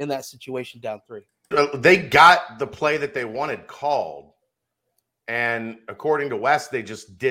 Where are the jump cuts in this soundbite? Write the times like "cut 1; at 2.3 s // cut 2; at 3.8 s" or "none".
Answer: cut 1; at 1.5 s